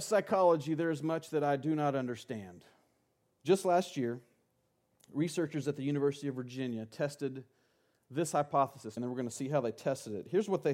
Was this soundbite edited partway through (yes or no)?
yes